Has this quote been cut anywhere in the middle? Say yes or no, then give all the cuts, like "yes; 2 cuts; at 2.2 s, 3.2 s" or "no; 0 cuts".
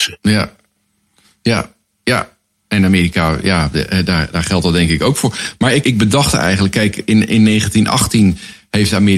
yes; 1 cut; at 5.8 s